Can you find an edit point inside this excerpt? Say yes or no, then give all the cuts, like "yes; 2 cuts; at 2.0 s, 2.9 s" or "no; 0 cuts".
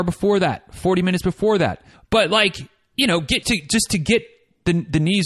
yes; 2 cuts; at 1.9 s, 3.4 s